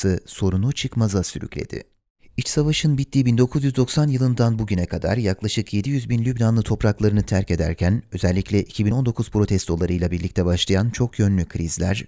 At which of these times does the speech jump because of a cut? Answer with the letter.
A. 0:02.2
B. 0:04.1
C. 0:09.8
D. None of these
A